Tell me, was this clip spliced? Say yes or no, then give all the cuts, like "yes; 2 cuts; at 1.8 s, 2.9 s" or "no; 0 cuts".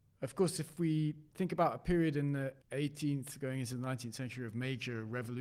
yes; 1 cut; at 2.6 s